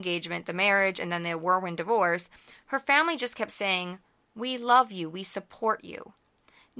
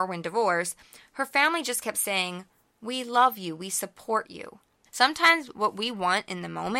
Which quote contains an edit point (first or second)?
second